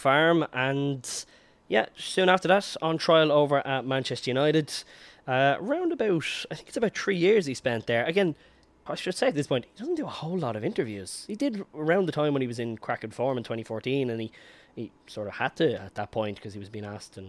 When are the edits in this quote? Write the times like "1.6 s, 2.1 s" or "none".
8.9 s